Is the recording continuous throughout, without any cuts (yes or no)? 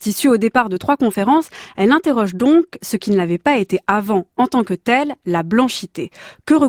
yes